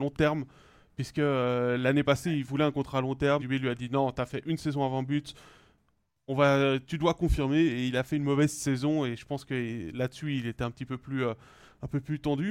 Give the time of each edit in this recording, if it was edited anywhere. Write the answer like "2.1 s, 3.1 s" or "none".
3.4 s